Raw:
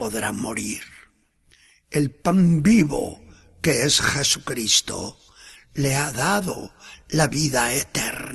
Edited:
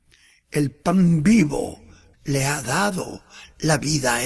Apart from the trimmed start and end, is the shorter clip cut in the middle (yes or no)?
yes